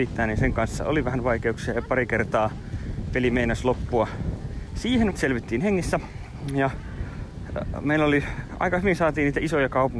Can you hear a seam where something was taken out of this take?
yes; 1 cut; at 5.1 s

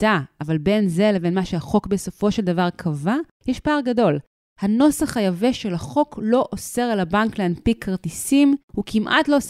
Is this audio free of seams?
yes; 0 cuts

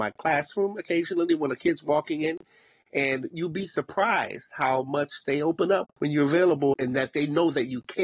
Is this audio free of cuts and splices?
yes; 0 cuts

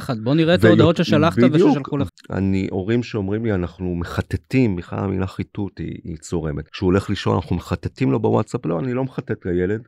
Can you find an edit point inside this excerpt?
yes; 2 cuts; at 2.1 s, 6.7 s

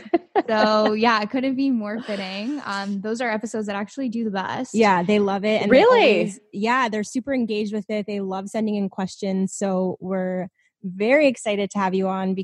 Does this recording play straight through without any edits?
yes; 0 cuts

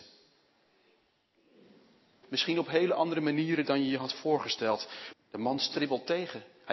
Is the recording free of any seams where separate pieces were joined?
no; 2 cuts; at 2.2 s, 5.1 s

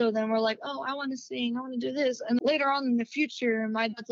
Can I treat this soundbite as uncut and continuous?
no; 1 cut; at 2.4 s

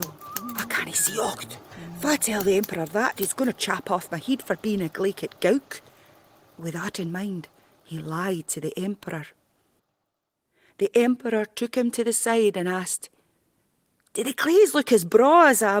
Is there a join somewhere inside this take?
no; 0 cuts

